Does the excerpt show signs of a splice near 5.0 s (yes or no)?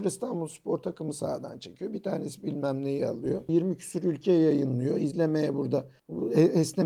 no